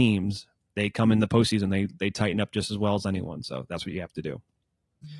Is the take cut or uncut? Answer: uncut